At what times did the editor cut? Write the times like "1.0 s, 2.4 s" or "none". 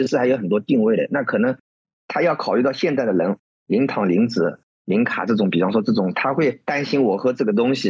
none